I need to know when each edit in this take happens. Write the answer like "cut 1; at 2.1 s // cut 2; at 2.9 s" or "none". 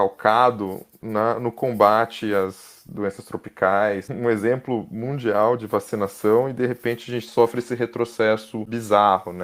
cut 1; at 4.1 s